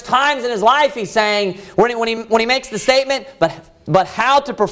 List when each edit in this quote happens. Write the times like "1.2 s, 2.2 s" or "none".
none